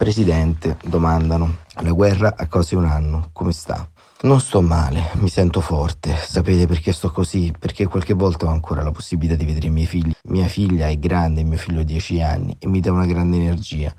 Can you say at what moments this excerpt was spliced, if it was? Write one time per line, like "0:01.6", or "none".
0:10.1